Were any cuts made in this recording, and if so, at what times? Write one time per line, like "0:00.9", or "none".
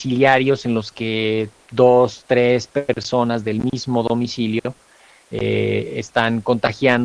none